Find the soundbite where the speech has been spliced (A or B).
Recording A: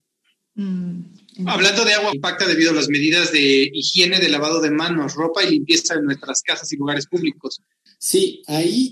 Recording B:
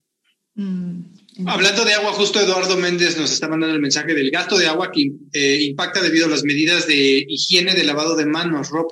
A